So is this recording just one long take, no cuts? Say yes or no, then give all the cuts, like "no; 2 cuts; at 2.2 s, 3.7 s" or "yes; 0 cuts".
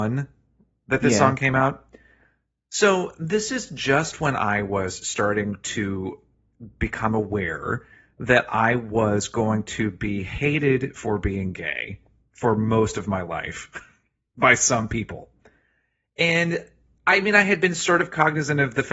yes; 0 cuts